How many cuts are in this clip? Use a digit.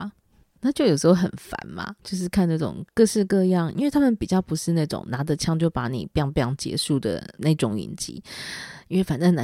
2